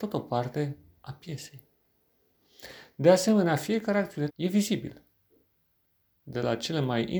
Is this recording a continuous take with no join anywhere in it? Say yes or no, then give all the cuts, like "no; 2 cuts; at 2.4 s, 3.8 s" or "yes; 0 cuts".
no; 1 cut; at 4.3 s